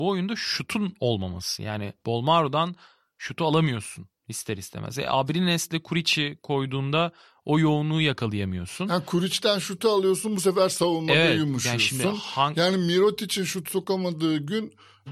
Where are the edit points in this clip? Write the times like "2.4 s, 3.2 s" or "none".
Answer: none

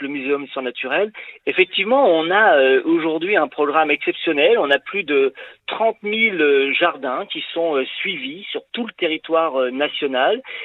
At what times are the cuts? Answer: 1.4 s

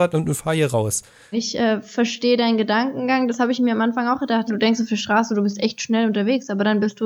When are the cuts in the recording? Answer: 1.3 s, 4.5 s

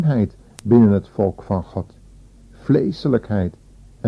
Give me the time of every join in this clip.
2.3 s

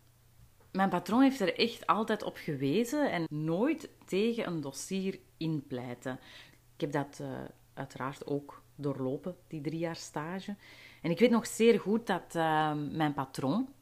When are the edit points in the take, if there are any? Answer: 3.3 s, 6.5 s

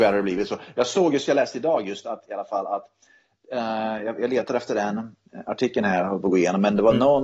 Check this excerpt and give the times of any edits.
none

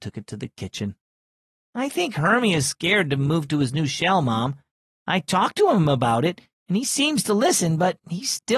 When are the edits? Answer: none

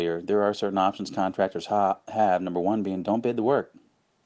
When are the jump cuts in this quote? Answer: none

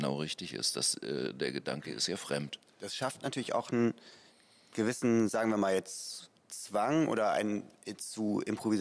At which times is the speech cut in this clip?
none

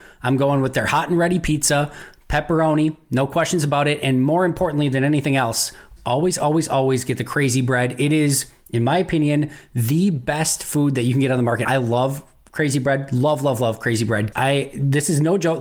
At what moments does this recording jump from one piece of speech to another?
6.0 s, 11.6 s, 14.3 s

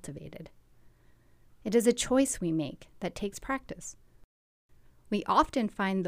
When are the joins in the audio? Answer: none

